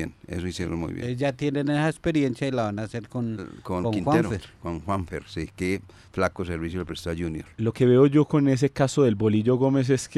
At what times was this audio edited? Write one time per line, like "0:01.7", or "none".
none